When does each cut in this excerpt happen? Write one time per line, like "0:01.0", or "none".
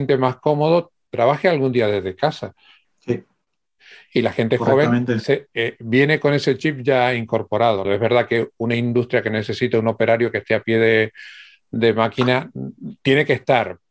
0:02.8
0:07.8